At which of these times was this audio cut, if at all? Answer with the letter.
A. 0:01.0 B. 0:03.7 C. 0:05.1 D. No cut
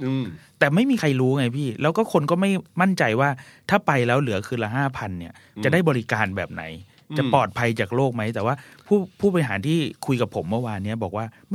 D